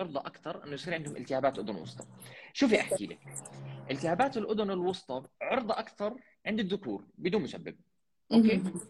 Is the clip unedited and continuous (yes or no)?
no